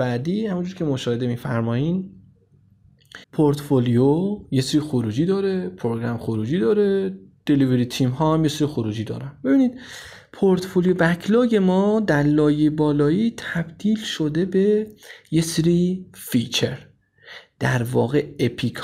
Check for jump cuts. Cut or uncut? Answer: cut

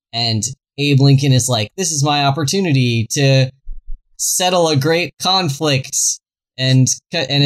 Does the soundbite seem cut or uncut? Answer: uncut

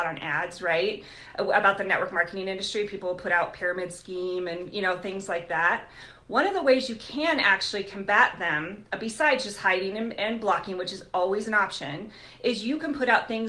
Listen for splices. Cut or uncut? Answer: uncut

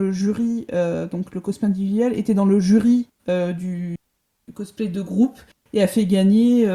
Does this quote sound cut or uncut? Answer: uncut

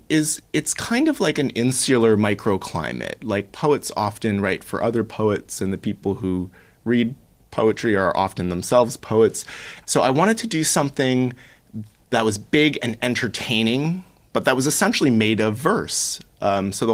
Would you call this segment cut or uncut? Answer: cut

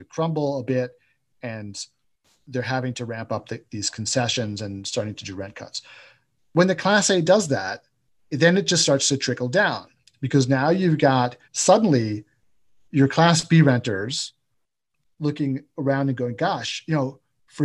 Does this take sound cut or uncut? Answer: cut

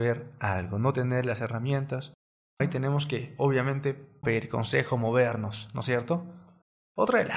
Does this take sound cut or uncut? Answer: cut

